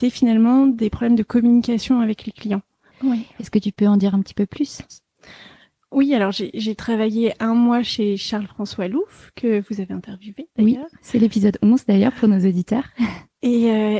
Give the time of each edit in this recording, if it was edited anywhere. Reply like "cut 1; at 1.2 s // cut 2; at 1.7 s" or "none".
cut 1; at 2.9 s